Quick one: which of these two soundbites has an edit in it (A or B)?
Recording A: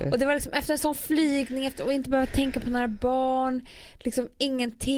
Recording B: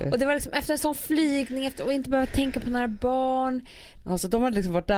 B